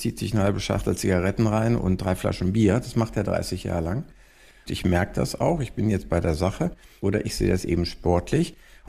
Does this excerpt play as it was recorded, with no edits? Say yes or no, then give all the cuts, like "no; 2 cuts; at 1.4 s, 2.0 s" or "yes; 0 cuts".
no; 1 cut; at 4.7 s